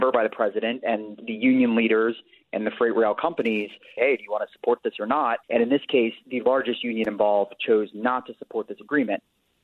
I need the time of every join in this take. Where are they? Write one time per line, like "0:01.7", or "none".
0:04.0
0:05.4